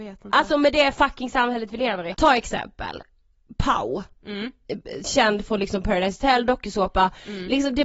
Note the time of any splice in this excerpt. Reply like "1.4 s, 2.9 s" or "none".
2.1 s